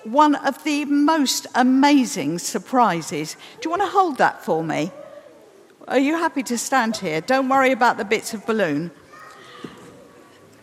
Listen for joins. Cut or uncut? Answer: uncut